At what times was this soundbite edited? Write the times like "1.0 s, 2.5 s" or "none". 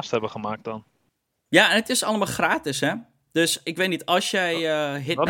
none